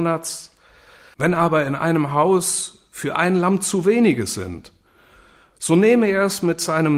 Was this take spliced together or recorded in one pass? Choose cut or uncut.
cut